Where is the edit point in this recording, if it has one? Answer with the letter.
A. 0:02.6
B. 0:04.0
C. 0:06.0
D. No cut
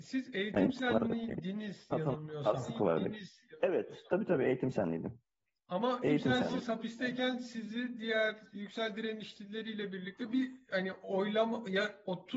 C